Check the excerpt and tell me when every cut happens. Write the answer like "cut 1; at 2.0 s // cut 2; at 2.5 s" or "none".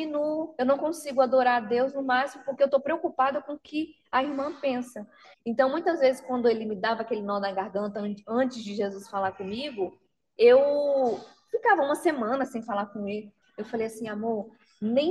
cut 1; at 5.3 s // cut 2; at 13.4 s